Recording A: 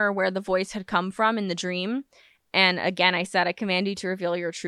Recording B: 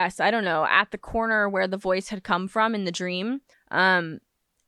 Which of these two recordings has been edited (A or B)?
B